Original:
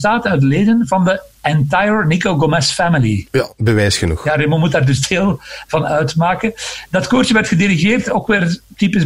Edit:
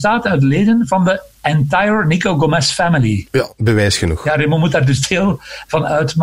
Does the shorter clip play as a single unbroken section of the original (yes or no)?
yes